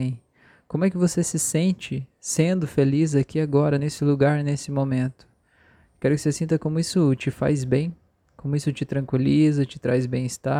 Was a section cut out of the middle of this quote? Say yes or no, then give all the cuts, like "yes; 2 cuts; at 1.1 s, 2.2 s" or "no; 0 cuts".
no; 0 cuts